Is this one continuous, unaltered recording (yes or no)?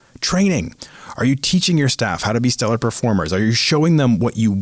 yes